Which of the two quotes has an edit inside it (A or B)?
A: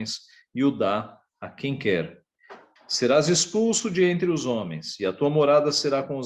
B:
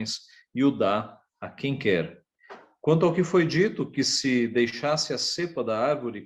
A